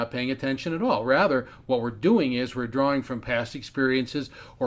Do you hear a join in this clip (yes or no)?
no